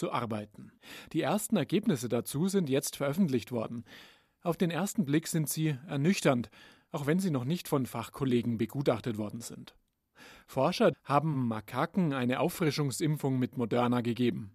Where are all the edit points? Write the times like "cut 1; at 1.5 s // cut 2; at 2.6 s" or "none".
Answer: cut 1; at 10.9 s

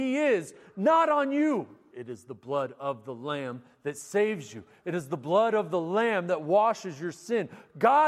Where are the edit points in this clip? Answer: cut 1; at 1.9 s

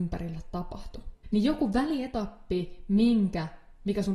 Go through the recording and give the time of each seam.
cut 1; at 1.2 s

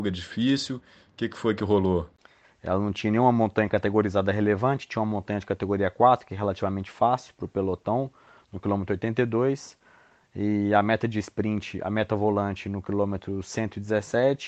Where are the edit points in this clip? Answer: cut 1; at 2.4 s

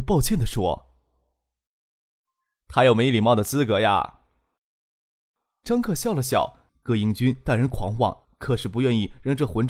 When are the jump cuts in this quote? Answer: cut 1; at 6.7 s // cut 2; at 8.2 s

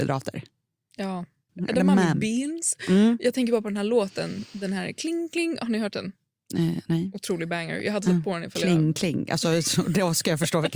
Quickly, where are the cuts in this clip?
cut 1; at 1.5 s

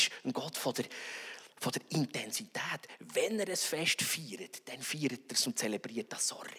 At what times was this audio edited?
none

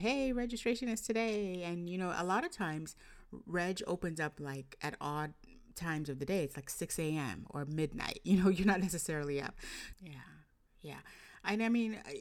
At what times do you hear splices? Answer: cut 1; at 9.9 s

